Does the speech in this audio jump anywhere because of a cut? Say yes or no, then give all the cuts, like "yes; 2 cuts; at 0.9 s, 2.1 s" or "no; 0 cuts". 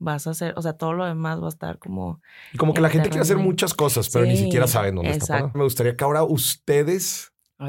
yes; 1 cut; at 5.5 s